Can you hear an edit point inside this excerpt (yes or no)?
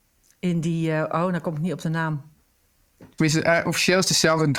yes